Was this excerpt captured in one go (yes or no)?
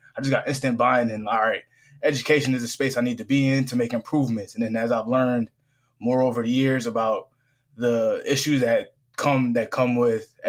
yes